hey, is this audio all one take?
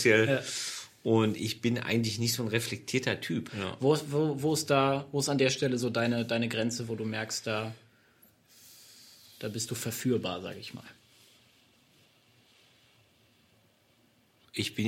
no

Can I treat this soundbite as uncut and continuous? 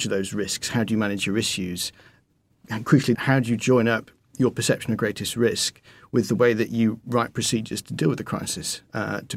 no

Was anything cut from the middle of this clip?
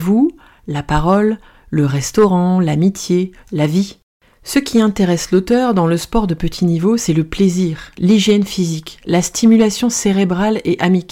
yes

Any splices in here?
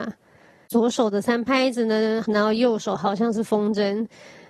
yes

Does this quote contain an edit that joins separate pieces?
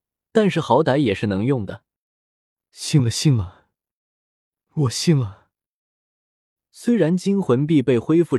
no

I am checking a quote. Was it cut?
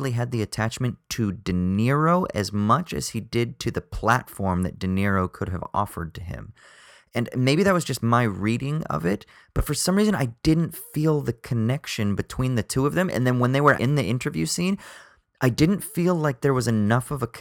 yes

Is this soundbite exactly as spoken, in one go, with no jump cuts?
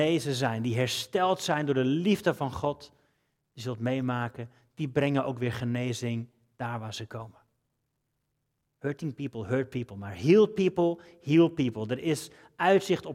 yes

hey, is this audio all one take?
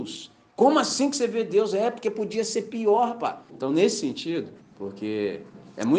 no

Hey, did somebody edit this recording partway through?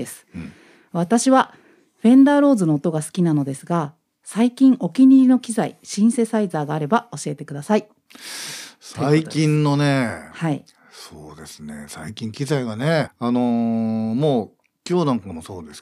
yes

